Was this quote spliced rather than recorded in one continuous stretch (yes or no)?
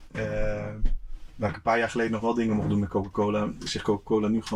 no